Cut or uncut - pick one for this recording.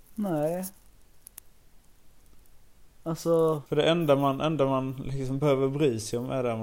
cut